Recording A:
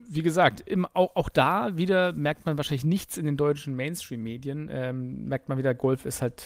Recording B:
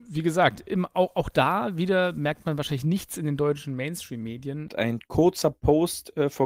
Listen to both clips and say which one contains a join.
B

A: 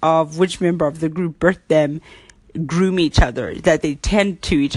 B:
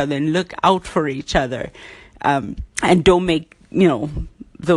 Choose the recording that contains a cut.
B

